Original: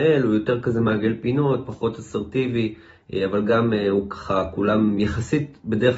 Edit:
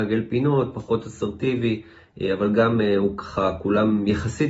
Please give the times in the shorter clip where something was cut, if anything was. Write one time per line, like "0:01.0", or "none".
none